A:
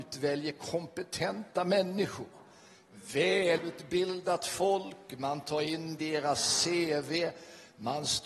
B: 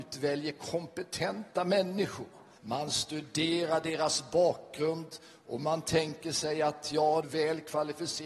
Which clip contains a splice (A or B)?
B